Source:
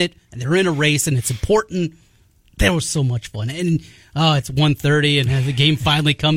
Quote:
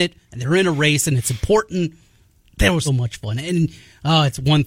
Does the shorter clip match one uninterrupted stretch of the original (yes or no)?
no